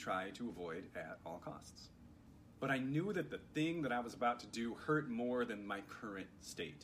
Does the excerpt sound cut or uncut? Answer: cut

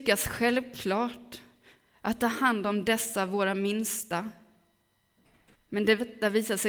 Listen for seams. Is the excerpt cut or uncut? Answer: cut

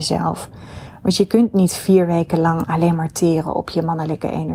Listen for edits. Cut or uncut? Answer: uncut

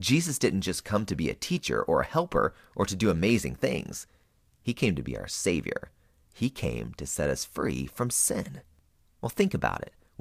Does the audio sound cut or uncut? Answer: uncut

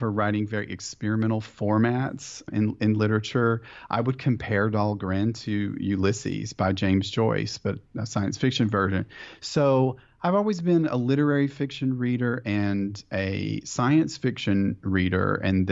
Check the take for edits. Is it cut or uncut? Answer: uncut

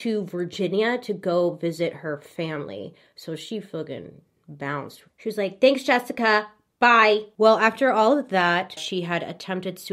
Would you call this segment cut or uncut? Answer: cut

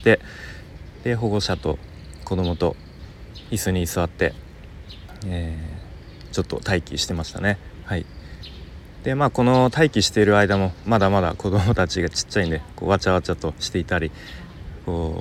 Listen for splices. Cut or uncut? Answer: cut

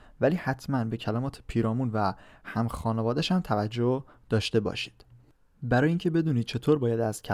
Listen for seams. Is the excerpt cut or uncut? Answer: uncut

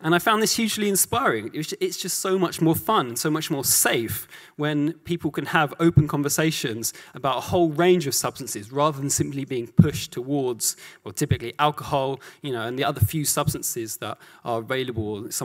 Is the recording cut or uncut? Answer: uncut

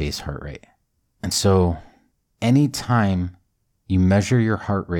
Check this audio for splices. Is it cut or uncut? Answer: uncut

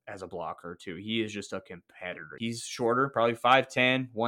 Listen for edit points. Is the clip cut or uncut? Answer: cut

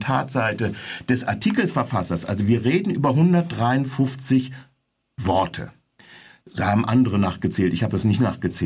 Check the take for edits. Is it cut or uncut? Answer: uncut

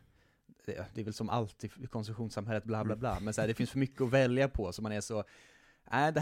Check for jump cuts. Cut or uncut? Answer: uncut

